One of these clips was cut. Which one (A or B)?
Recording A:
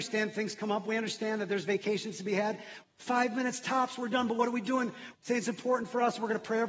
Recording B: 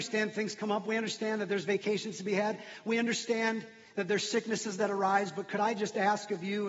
A